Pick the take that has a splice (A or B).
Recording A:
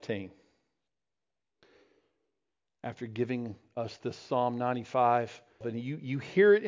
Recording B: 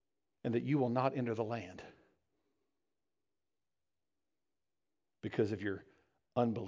A